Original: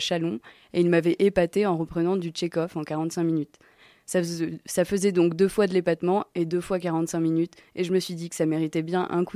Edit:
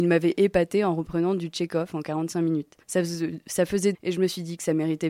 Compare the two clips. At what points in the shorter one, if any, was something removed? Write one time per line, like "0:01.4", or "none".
0:02.8
0:03.9